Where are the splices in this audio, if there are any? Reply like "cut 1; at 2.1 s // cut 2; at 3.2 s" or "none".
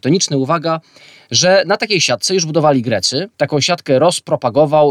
cut 1; at 3.3 s